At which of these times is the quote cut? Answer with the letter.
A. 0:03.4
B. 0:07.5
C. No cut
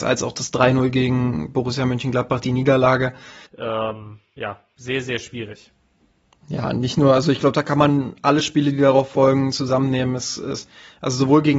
A